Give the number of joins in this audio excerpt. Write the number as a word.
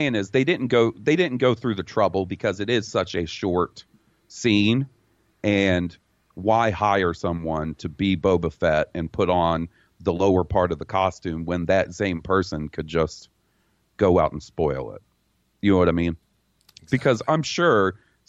zero